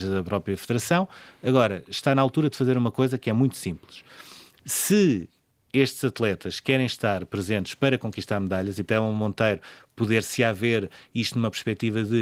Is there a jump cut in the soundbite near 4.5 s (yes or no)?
yes